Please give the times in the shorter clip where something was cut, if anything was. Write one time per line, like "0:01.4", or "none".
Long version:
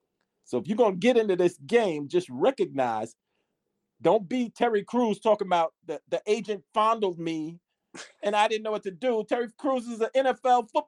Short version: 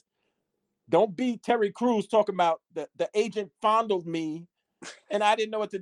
none